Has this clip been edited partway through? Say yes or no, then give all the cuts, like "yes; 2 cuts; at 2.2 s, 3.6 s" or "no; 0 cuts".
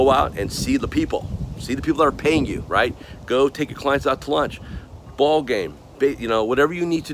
no; 0 cuts